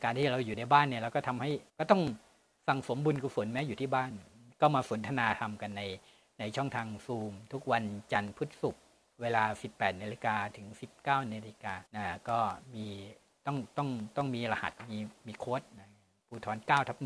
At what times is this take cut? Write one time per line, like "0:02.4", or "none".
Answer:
0:01.7
0:11.9